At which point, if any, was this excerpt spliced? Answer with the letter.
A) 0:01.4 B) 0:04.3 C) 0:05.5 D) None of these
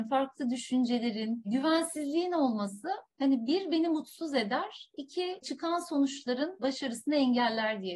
D